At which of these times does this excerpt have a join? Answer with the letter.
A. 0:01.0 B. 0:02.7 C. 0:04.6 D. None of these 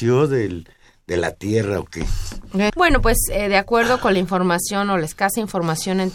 B